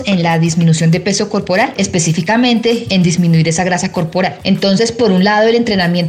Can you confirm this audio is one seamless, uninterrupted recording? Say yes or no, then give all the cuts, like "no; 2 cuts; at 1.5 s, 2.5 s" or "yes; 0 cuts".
no; 1 cut; at 4.4 s